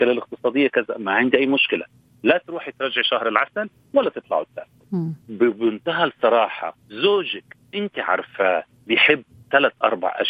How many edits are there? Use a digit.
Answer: 2